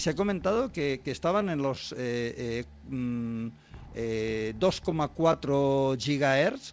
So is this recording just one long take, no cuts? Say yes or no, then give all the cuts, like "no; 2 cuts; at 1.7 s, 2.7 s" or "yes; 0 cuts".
yes; 0 cuts